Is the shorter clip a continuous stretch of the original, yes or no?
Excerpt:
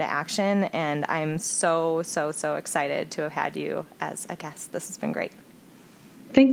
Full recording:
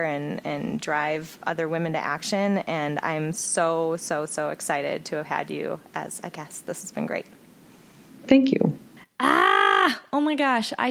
yes